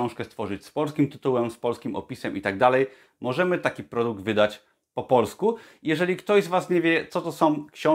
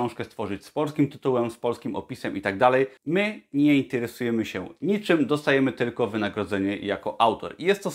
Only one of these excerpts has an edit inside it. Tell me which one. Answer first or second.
second